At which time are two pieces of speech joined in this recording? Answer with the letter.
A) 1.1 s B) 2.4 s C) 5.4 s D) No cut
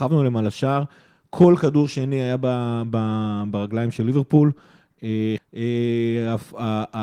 C